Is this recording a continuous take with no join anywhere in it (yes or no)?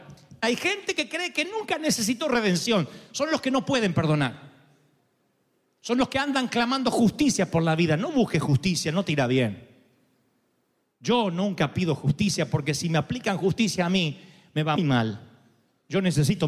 no